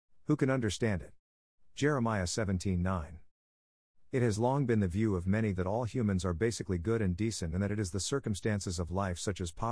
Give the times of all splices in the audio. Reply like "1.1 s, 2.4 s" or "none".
none